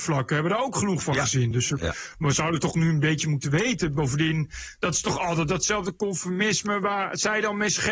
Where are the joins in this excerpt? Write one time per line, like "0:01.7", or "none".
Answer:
none